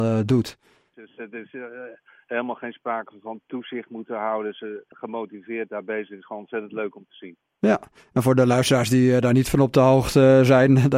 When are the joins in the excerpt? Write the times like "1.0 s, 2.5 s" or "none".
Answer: 0.9 s, 4.9 s

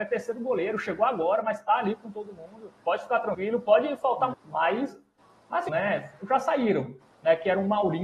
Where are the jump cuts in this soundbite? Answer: 2.8 s, 4.3 s, 5.7 s

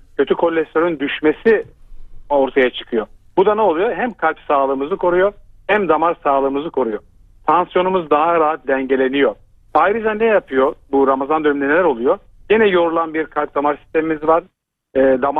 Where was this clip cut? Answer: 9.7 s, 12.3 s

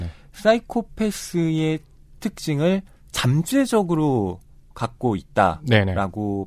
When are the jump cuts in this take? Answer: none

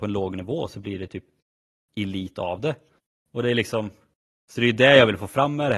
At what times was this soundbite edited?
3.1 s

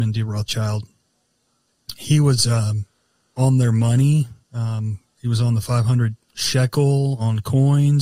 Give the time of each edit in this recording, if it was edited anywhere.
4.4 s, 6.2 s

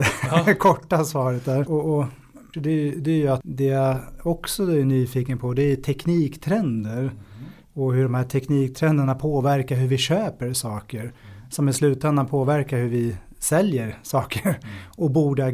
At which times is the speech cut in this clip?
2.5 s

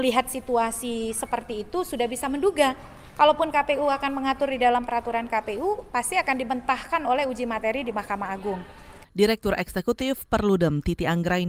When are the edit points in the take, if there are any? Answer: 9.0 s

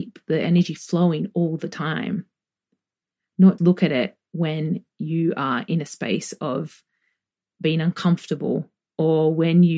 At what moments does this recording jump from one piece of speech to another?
3.6 s

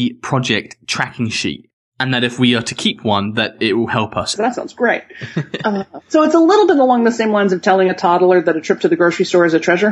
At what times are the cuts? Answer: 4.4 s, 6.0 s

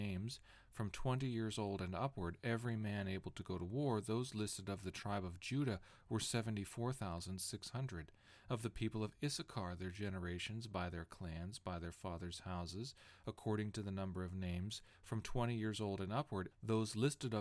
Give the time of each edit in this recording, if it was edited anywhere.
16.5 s

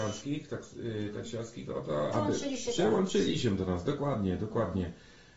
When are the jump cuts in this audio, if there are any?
2.1 s

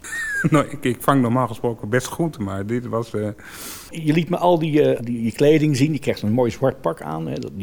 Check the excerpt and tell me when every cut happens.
5.0 s

